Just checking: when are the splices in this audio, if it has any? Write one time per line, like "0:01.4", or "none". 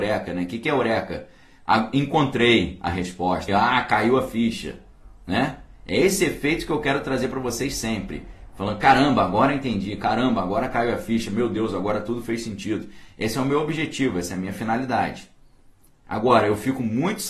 0:03.5